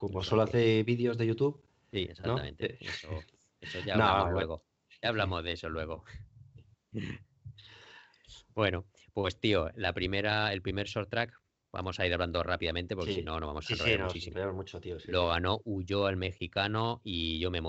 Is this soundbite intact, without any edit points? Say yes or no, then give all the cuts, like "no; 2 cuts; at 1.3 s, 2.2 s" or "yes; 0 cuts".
yes; 0 cuts